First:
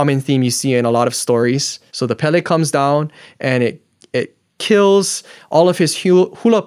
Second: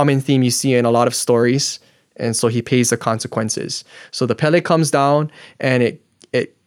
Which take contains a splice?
first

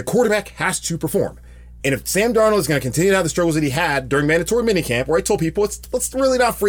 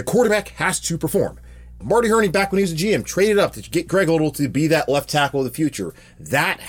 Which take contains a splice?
second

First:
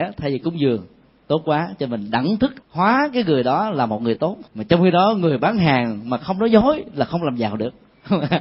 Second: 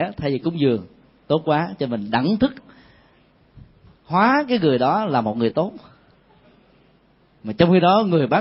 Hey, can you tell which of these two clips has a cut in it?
first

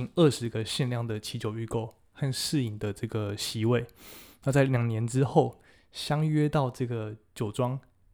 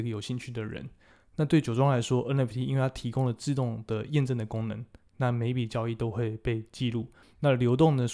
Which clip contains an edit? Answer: second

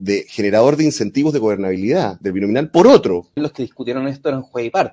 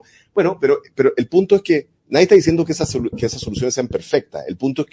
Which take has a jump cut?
first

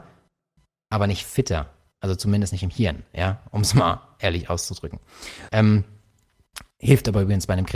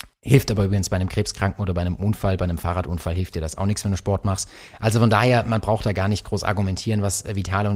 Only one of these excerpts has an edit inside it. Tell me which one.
first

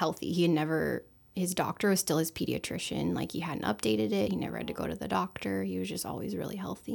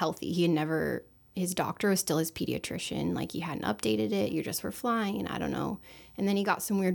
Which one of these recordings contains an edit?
second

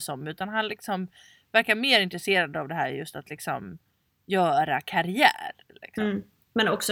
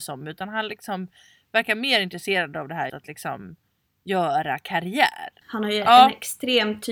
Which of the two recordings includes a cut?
second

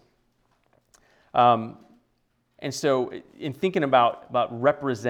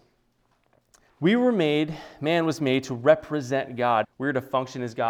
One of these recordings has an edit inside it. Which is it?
second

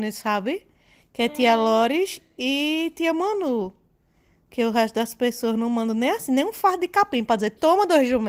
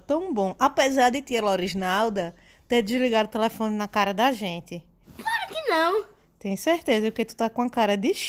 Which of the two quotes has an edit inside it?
second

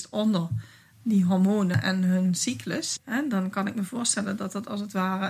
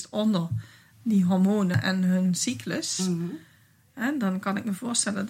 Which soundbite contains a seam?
first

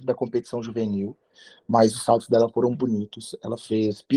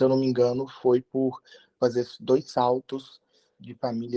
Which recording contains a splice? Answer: first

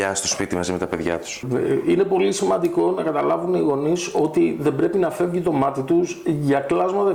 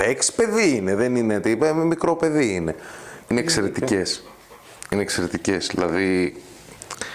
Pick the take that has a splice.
second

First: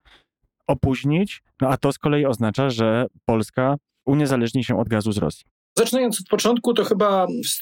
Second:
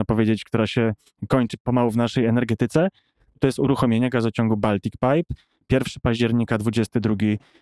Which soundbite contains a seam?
first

